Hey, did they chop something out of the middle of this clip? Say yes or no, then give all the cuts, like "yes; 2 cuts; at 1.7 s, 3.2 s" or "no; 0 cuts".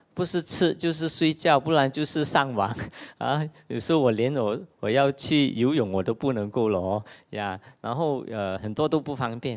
no; 0 cuts